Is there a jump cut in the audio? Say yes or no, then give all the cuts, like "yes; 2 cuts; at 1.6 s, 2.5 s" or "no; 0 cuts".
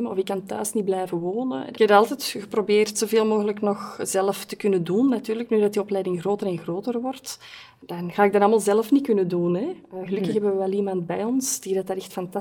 yes; 1 cut; at 1.7 s